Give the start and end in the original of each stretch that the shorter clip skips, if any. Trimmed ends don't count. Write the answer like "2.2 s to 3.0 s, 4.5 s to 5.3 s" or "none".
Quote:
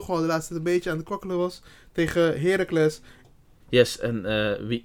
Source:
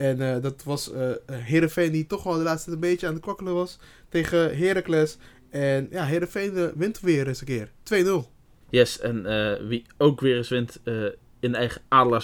5.4 s to 8.3 s